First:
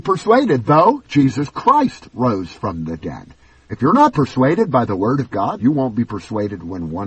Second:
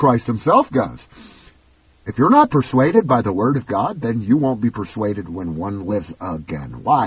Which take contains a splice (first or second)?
first